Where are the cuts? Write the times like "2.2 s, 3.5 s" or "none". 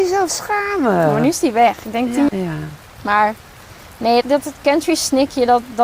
2.3 s, 4.2 s